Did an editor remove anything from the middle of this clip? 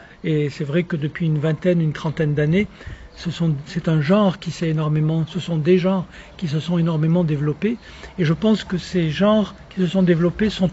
no; 0 cuts

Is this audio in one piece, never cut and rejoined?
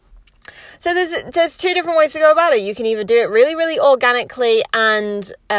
yes; 0 cuts

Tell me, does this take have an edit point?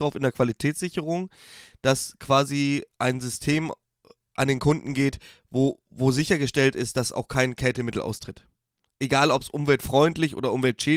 no; 0 cuts

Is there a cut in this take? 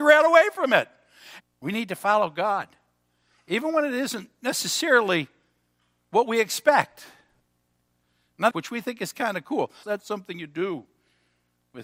yes; 3 cuts; at 1.4 s, 8.5 s, 9.8 s

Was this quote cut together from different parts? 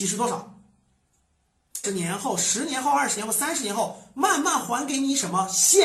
yes; 1 cut; at 1.8 s

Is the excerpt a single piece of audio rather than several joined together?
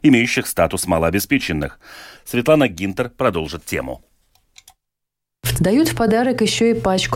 no; 2 cuts; at 2.2 s, 5.6 s

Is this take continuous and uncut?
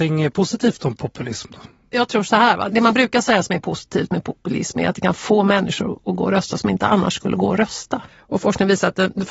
no; 2 cuts; at 2.7 s, 8.1 s

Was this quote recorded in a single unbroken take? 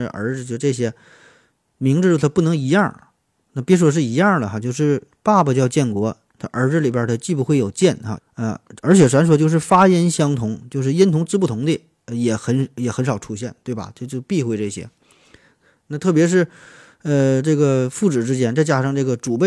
no; 1 cut; at 8.2 s

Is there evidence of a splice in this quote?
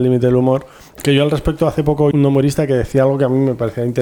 yes; 1 cut; at 2.1 s

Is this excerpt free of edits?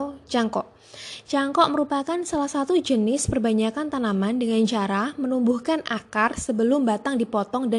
yes; 0 cuts

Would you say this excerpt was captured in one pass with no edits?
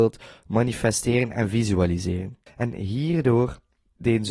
no; 1 cut; at 2.5 s

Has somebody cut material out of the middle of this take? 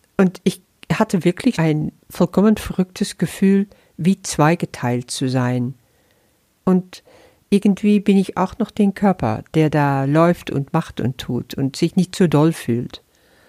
yes; 2 cuts; at 1.5 s, 6.5 s

